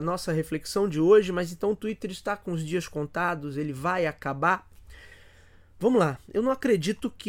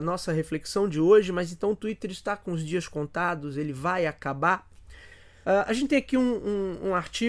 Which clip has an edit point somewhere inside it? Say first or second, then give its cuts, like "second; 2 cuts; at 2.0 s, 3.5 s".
second; 1 cut; at 5.4 s